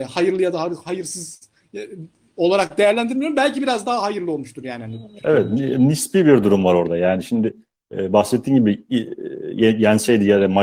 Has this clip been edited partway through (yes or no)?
yes